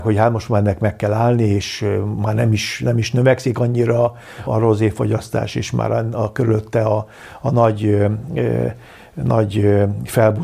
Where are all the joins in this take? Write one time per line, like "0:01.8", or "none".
0:04.5